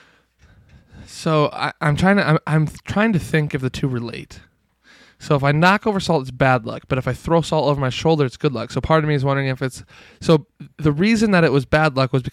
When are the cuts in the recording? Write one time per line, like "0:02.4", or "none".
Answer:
none